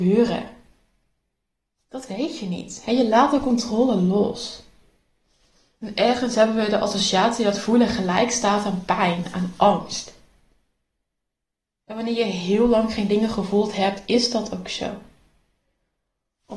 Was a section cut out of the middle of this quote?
no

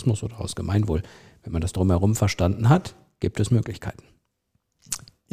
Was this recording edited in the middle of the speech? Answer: no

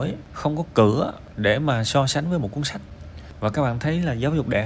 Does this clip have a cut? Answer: no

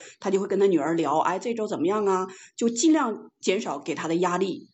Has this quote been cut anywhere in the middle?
no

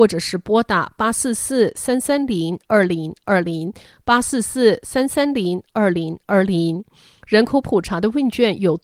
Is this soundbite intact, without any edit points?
yes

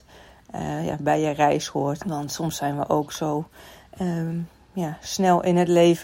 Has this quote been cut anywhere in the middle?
yes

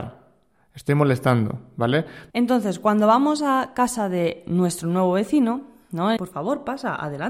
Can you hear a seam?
yes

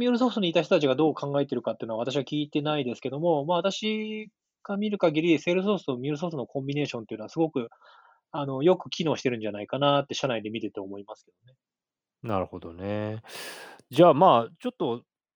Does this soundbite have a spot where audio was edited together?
no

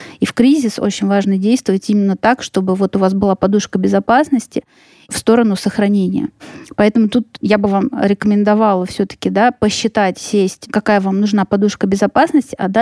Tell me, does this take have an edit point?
no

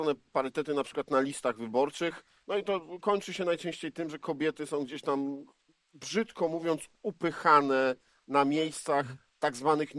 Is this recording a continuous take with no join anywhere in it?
yes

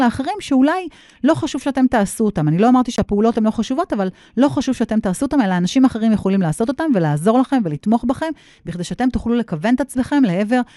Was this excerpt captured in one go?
yes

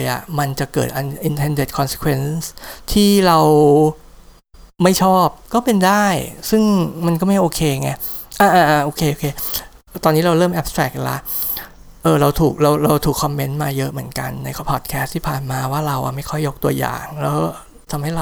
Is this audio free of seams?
no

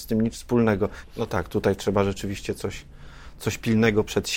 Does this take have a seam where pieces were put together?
yes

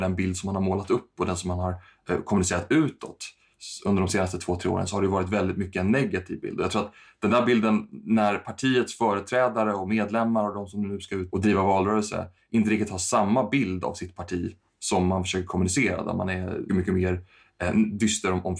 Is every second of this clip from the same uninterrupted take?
no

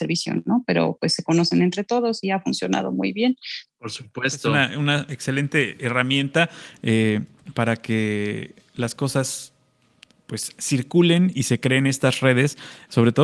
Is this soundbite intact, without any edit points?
no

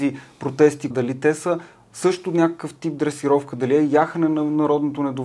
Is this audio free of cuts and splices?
no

